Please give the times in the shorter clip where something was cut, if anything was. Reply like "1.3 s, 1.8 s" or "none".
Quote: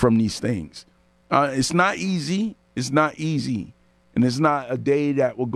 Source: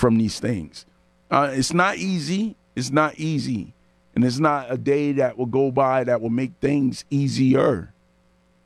none